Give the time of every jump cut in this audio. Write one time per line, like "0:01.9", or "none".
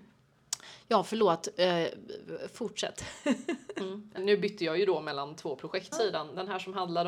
0:04.2
0:05.9